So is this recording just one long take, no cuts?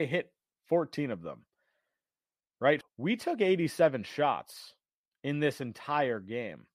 no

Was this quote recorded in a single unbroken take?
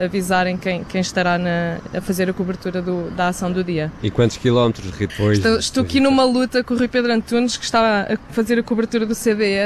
no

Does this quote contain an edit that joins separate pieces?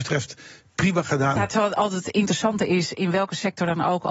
yes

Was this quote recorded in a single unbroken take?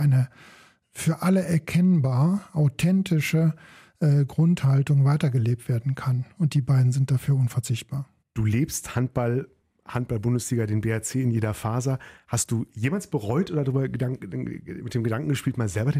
yes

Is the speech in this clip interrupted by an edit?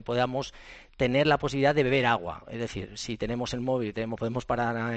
no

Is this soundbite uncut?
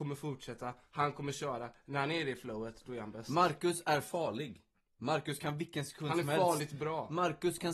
yes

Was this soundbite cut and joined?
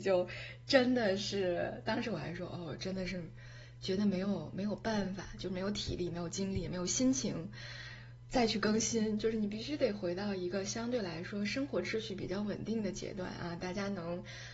no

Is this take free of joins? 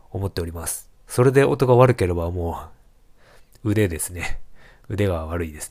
yes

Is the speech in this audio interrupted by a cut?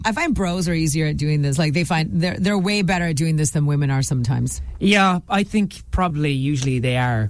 no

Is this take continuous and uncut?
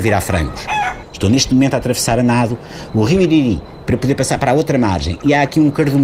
no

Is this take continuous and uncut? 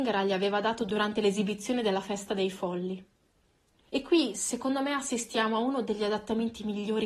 yes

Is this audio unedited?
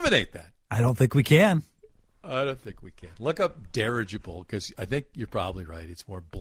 yes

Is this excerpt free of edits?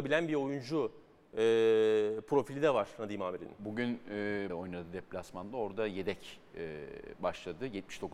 no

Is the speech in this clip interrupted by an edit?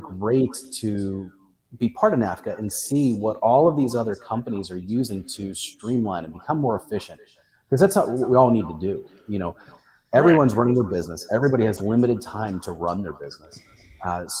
no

